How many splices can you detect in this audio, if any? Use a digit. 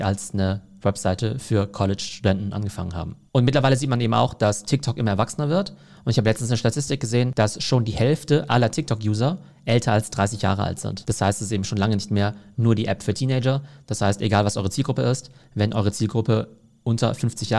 0